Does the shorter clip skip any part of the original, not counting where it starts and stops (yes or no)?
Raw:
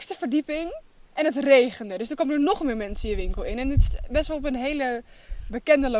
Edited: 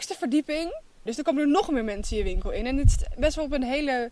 yes